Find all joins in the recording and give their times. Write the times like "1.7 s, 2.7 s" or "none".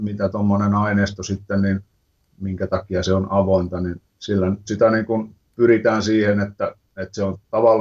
4.7 s

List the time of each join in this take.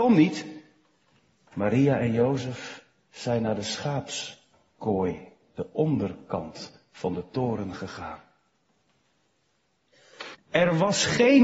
1.5 s, 10.3 s

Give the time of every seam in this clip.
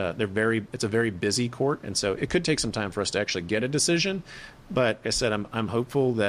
5.0 s

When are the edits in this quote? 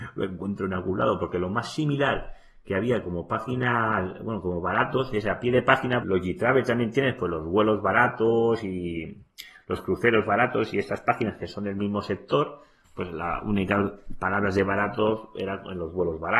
6.0 s

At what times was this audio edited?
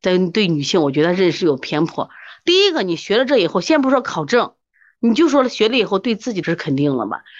6.4 s

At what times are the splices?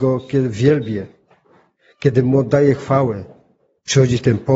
none

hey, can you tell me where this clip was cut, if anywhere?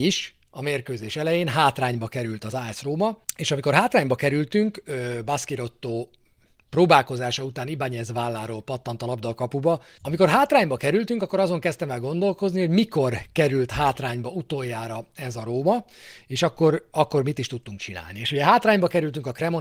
3.2 s, 10.0 s

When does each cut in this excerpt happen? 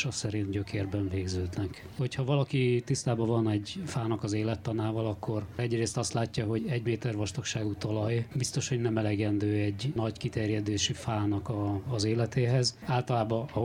6.6 s

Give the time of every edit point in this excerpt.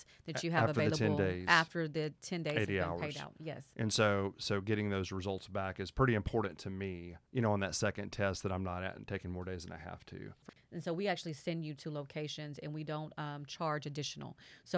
none

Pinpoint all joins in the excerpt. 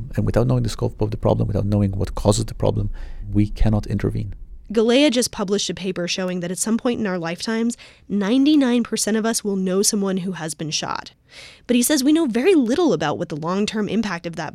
none

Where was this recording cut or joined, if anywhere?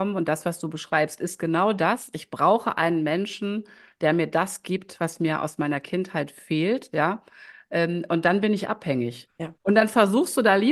6.9 s, 9.3 s

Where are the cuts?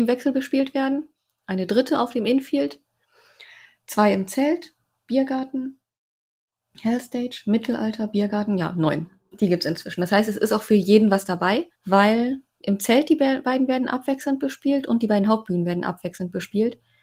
9.3 s, 11.7 s

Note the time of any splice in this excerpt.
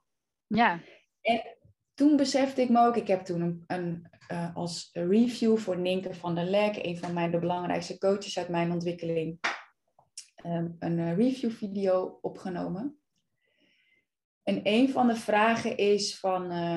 none

